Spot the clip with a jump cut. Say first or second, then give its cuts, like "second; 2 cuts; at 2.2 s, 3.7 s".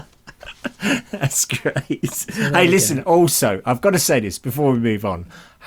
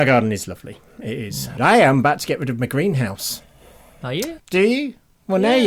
second; 2 cuts; at 1.6 s, 4.4 s